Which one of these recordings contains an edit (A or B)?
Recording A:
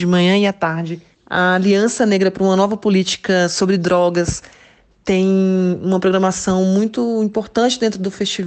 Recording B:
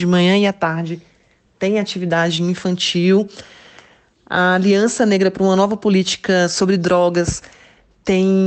A